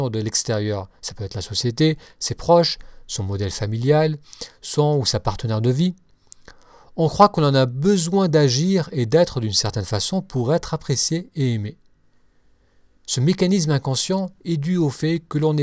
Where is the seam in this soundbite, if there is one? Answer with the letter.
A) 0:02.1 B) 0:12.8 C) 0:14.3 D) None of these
D